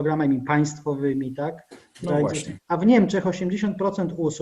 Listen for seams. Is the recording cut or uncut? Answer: cut